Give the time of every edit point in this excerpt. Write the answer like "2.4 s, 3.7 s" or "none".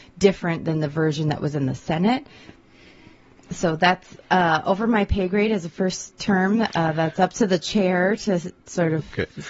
none